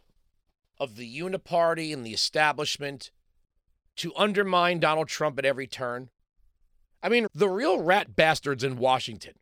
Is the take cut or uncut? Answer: cut